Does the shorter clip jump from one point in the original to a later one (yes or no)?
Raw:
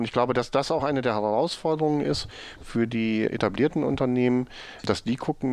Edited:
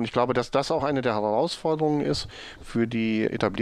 no